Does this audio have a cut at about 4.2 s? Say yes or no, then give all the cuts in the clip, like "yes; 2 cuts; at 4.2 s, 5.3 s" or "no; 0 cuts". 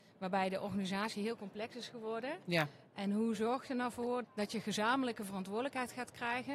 yes; 1 cut; at 4.2 s